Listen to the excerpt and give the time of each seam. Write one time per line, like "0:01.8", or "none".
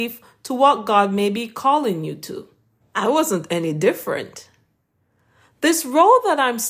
0:02.8